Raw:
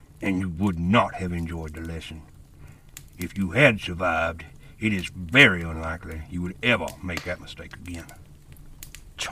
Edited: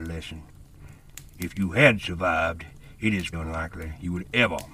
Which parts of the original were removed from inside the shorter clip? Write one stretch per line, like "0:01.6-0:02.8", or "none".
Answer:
0:05.1-0:05.6